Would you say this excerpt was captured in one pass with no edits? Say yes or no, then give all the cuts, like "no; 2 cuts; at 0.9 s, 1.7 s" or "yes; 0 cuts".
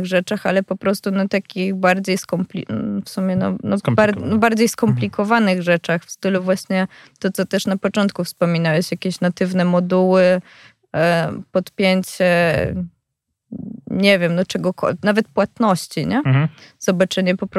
yes; 0 cuts